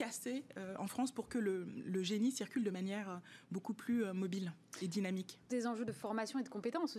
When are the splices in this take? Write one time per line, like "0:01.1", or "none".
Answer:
0:05.5